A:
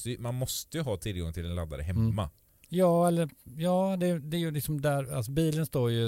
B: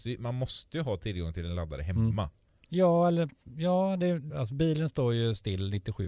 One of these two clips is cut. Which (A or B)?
B